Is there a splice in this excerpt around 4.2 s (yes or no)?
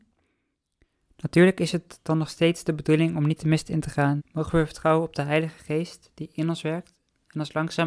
yes